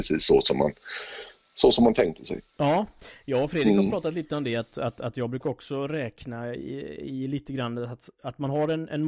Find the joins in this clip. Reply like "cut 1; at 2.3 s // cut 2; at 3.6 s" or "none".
none